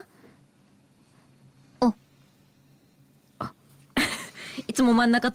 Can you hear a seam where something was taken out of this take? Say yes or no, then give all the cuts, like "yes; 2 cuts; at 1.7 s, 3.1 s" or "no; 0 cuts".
no; 0 cuts